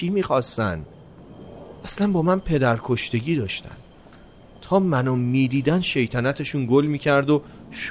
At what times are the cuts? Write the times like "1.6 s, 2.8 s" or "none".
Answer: none

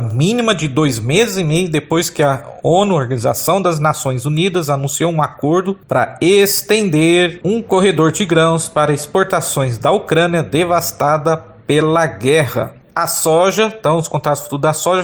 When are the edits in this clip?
none

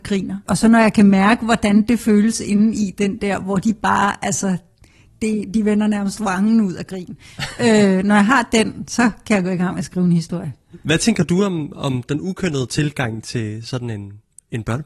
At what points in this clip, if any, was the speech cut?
none

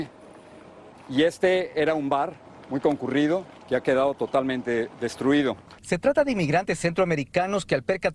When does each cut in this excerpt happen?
0.9 s, 5.8 s

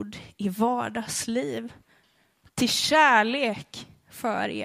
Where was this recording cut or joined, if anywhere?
none

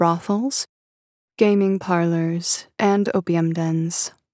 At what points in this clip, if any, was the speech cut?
none

